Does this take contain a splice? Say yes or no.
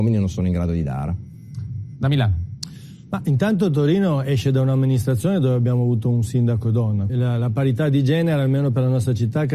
yes